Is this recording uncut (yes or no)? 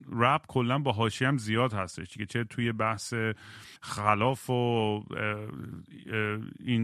no